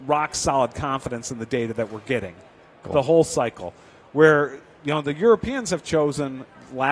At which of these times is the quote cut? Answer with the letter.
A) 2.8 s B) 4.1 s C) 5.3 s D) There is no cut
A